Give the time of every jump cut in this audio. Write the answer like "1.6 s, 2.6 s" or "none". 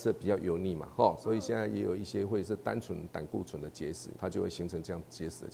4.1 s